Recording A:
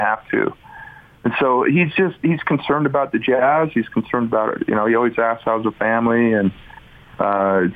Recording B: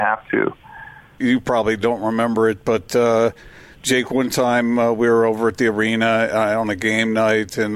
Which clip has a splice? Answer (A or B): B